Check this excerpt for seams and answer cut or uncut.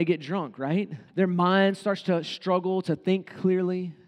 cut